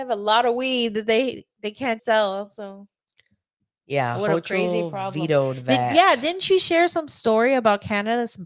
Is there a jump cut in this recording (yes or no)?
yes